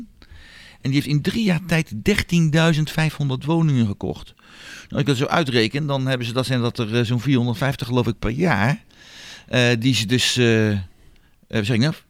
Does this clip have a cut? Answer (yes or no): no